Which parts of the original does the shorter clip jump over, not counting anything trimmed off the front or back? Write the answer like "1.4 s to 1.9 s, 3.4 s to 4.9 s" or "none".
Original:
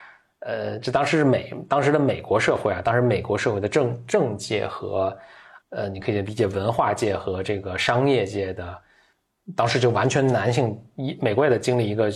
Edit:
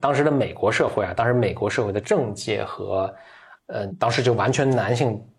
3.7 s to 4.0 s, 5.9 s to 9.5 s